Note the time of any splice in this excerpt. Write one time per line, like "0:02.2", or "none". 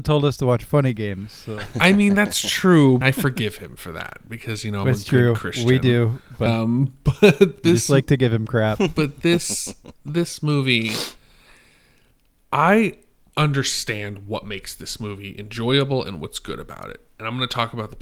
0:03.0
0:06.5